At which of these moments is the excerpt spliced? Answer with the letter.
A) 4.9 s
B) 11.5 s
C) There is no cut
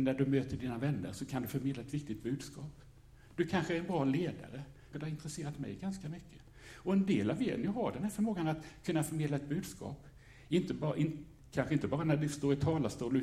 A